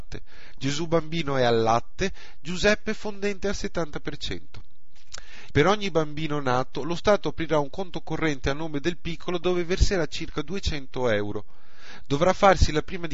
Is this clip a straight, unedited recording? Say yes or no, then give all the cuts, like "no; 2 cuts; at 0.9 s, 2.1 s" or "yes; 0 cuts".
no; 1 cut; at 5.5 s